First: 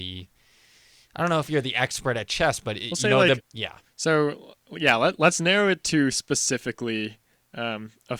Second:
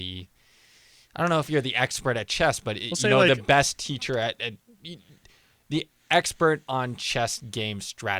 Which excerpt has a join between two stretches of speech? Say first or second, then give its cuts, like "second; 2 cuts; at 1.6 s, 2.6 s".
first; 1 cut; at 3.4 s